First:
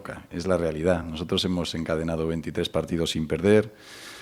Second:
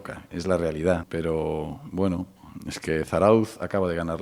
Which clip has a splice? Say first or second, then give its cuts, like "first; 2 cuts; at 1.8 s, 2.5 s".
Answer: second; 1 cut; at 1.0 s